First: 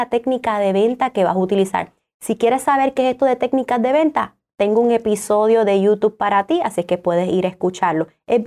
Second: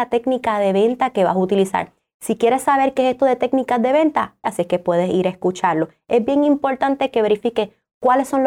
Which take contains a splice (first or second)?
second